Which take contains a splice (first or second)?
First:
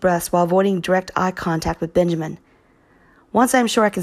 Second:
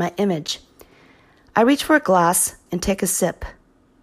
second